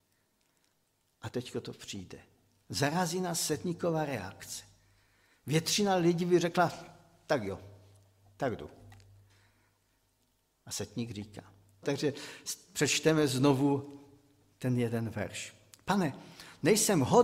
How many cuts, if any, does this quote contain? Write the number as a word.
one